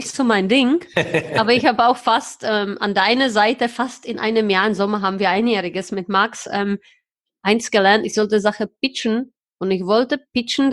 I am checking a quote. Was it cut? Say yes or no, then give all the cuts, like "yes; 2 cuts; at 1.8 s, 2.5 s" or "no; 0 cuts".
no; 0 cuts